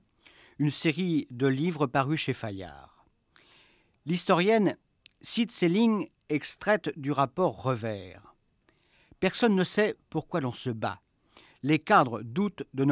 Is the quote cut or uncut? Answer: uncut